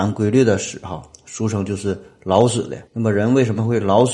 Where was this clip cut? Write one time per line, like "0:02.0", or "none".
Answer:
0:02.9